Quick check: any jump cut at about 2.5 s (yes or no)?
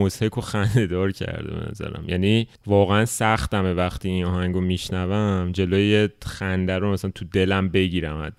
yes